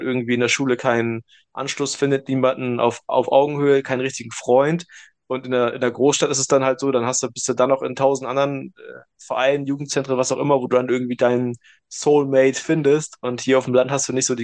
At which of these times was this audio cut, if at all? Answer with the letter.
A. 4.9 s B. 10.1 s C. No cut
C